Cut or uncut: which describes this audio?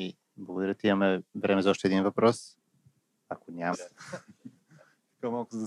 cut